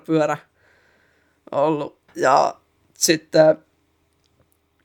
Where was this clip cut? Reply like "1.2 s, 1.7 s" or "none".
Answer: 2.1 s